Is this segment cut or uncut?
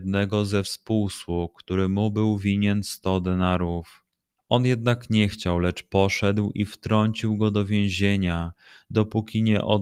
cut